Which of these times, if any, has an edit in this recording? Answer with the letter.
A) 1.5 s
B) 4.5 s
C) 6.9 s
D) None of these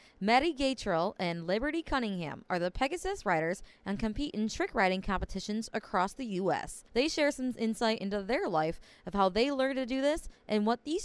C